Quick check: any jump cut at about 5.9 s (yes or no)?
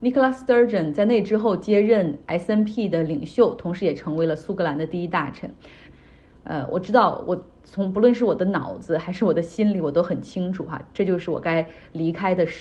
yes